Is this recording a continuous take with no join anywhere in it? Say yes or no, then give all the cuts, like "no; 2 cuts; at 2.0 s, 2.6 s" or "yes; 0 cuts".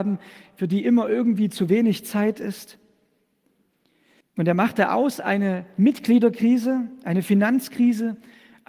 no; 1 cut; at 4.2 s